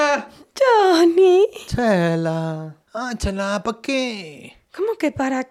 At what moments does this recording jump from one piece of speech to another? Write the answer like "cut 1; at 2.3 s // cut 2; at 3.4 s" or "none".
cut 1; at 2.8 s